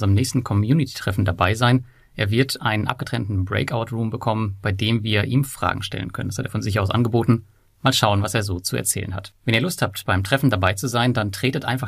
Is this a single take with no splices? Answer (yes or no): yes